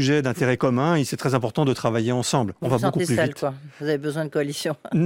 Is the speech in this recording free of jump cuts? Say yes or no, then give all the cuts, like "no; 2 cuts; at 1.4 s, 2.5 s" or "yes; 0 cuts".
yes; 0 cuts